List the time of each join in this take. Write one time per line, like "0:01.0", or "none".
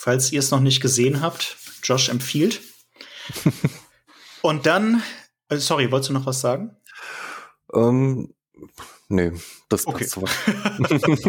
none